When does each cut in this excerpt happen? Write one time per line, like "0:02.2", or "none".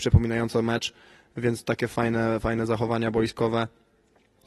none